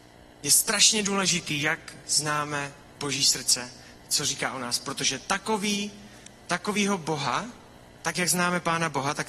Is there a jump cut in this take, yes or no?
no